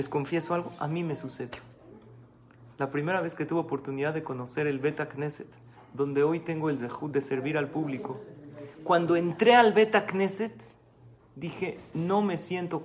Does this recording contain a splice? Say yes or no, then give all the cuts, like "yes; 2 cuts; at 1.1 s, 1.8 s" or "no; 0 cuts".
no; 0 cuts